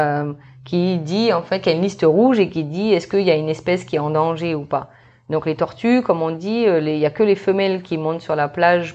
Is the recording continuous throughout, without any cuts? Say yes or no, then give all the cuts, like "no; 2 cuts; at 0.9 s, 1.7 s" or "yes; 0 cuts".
yes; 0 cuts